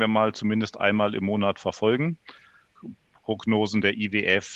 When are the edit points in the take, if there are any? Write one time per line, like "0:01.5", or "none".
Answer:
0:02.8